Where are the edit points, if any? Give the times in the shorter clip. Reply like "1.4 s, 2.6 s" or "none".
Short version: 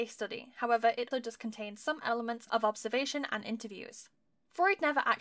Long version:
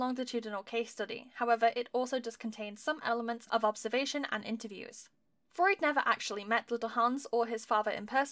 1.1 s